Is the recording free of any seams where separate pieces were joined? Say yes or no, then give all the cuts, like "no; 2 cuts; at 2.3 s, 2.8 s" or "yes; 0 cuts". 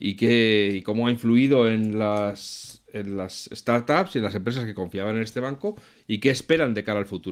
yes; 0 cuts